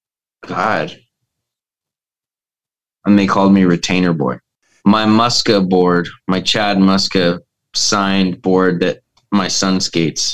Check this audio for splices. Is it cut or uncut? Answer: cut